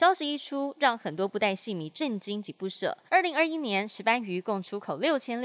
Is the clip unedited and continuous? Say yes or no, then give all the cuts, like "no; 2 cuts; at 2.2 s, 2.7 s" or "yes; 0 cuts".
no; 1 cut; at 3.1 s